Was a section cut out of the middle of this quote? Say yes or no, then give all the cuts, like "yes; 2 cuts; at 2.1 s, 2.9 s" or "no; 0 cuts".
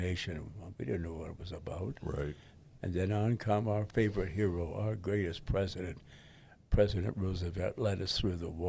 no; 0 cuts